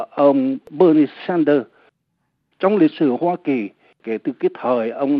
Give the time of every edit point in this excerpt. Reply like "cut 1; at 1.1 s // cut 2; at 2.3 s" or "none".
cut 1; at 2.5 s